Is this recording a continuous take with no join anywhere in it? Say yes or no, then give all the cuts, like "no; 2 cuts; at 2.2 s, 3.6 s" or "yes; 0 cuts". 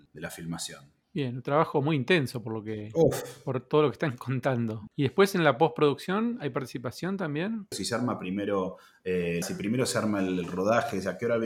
no; 3 cuts; at 4.9 s, 7.7 s, 9.4 s